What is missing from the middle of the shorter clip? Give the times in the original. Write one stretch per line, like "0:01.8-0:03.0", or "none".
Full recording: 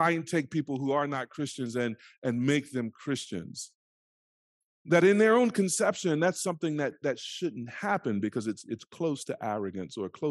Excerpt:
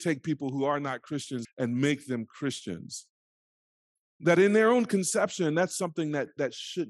0:01.7-0:02.1